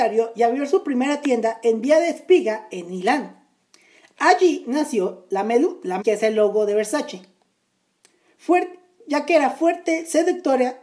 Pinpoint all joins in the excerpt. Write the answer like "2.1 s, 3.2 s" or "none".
6.0 s